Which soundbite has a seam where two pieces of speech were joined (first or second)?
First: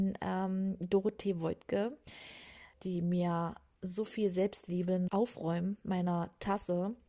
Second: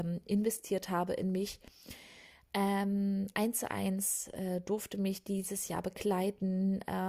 first